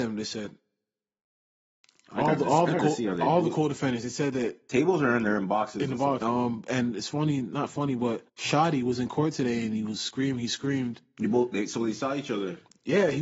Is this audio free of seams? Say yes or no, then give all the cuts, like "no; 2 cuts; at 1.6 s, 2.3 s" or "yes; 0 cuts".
no; 2 cuts; at 6.2 s, 8.3 s